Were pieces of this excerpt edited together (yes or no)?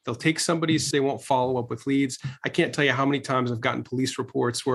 yes